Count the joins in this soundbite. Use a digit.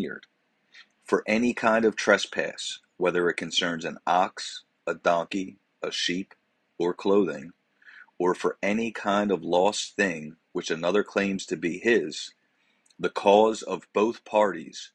1